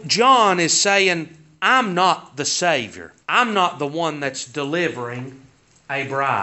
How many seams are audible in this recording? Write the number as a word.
one